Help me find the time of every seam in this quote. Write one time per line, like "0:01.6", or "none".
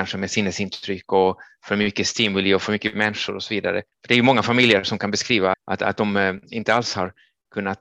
0:03.9
0:05.5